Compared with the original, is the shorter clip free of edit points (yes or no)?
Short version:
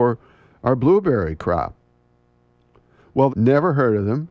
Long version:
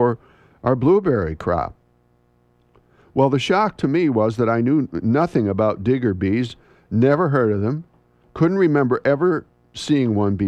no